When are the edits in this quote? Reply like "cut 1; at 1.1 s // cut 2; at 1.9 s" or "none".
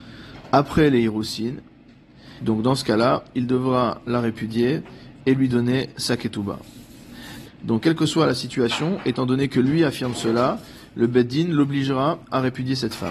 cut 1; at 2.4 s // cut 2; at 7.4 s